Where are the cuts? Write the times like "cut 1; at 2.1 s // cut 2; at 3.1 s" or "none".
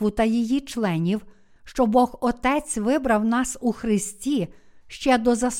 cut 1; at 1.6 s